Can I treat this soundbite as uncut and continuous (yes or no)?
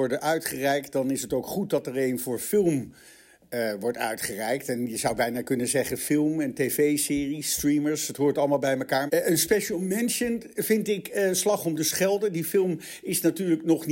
no